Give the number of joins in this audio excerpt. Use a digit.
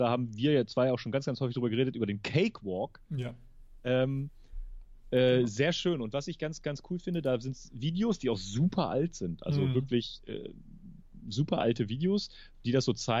1